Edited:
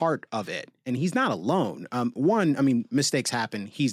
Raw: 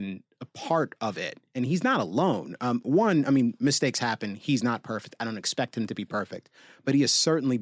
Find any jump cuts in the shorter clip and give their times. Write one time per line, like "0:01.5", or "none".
none